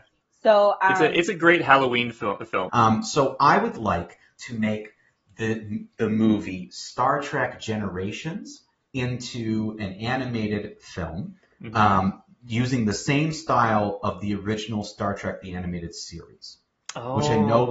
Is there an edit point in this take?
yes; 1 cut; at 2.7 s

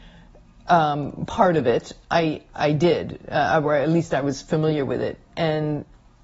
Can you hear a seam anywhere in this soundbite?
no; 0 cuts

